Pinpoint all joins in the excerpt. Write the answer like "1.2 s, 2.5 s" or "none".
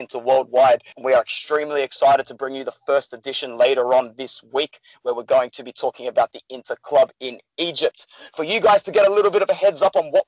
0.9 s